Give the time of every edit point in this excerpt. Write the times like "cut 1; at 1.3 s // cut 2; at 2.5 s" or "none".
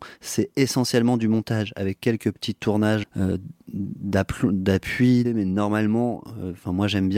cut 1; at 3.0 s // cut 2; at 5.2 s

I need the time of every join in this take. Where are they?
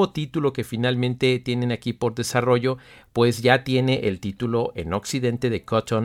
none

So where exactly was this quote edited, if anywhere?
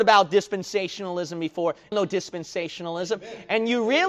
cut 1; at 1.9 s

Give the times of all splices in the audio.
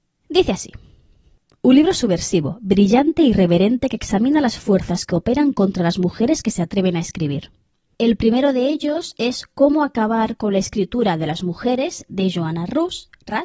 cut 1; at 7.9 s

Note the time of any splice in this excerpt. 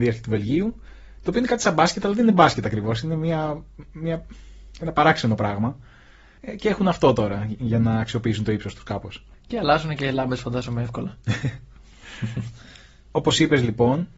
none

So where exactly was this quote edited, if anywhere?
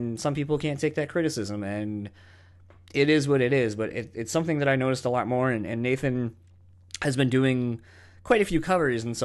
none

